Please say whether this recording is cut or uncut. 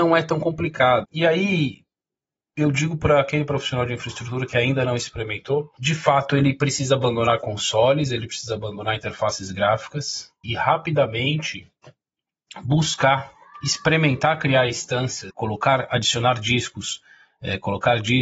cut